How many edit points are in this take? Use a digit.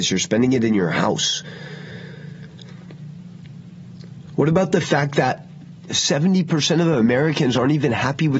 0